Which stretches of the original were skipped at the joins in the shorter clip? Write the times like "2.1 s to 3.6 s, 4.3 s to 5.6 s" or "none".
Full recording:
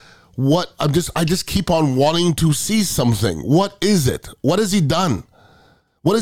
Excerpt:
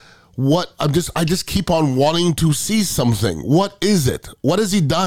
none